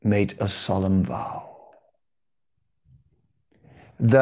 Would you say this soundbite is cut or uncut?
uncut